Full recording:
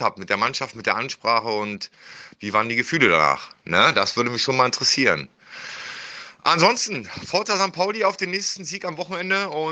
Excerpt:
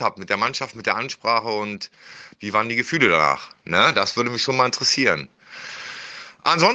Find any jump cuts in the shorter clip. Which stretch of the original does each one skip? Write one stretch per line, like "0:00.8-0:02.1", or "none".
none